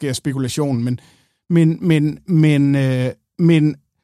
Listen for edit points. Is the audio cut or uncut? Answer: uncut